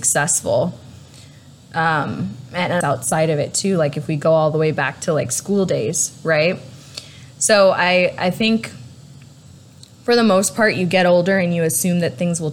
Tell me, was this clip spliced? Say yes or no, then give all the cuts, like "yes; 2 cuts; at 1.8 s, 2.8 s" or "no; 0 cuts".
yes; 1 cut; at 2.8 s